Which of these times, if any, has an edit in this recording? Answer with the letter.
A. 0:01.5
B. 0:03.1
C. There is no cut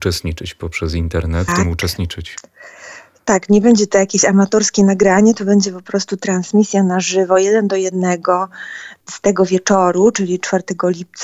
A